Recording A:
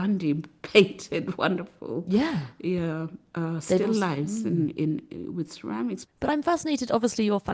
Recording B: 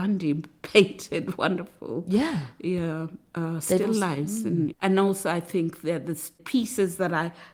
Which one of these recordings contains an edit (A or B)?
B